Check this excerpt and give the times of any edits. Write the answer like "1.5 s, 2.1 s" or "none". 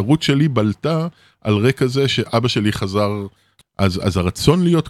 3.6 s